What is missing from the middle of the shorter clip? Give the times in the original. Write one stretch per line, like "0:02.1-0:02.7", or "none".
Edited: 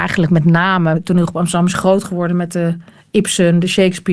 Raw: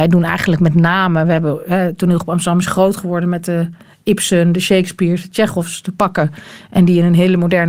0:01.2-0:01.9

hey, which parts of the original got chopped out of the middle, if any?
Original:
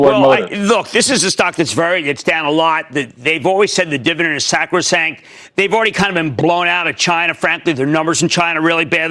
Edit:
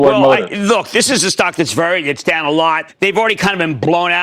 0:02.9-0:05.4

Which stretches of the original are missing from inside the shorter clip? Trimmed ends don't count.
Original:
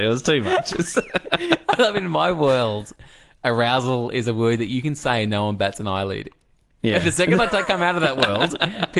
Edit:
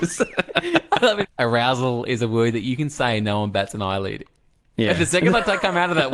0:02.0-0:03.3

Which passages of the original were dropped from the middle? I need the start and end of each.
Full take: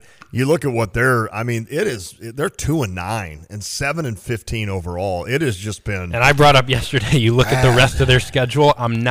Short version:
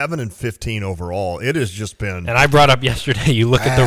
none

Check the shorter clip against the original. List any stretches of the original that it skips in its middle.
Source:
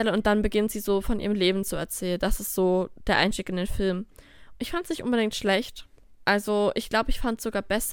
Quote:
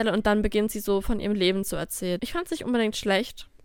0:02.2-0:04.6

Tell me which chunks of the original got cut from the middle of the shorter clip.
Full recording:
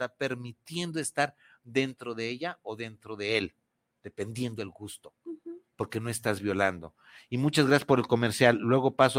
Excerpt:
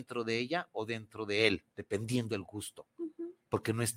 0:03.6-0:04.0

